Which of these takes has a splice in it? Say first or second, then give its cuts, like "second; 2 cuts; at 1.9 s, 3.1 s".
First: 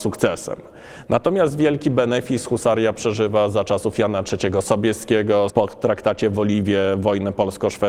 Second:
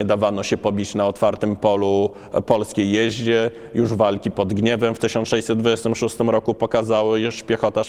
first; 1 cut; at 5.5 s